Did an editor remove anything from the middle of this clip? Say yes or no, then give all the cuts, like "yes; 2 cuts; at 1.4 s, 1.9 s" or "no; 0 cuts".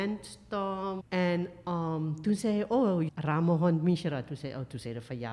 yes; 2 cuts; at 1.0 s, 3.1 s